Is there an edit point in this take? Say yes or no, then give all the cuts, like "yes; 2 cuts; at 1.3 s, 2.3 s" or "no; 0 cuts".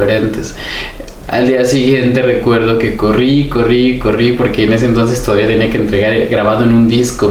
yes; 1 cut; at 1.3 s